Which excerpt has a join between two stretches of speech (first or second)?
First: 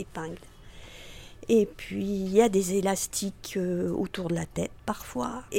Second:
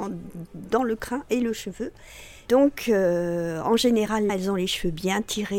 second